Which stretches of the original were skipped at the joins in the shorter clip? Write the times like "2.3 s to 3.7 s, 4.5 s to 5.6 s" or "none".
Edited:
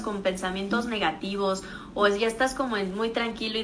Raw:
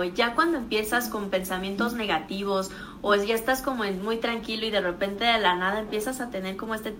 none